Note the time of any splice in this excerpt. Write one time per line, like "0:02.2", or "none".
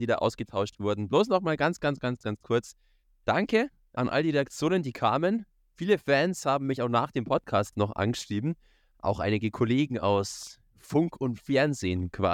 none